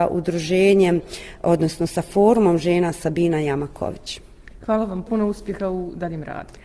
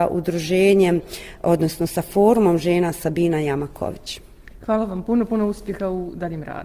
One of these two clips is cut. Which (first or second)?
first